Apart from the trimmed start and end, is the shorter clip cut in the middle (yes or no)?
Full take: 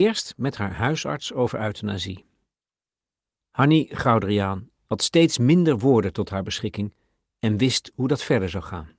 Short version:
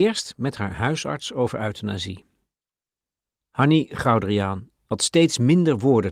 no